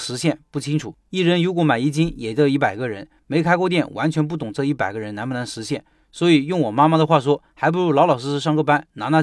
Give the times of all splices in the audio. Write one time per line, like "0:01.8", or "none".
none